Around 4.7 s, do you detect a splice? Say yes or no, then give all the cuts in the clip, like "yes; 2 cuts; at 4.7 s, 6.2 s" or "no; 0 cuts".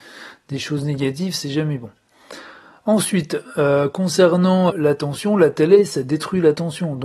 yes; 1 cut; at 4.7 s